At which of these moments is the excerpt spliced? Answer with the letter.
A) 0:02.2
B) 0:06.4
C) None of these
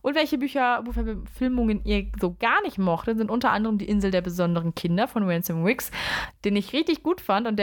C